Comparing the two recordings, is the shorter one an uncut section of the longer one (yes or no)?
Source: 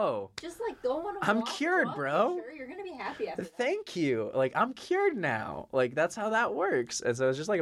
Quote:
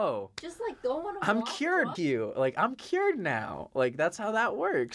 no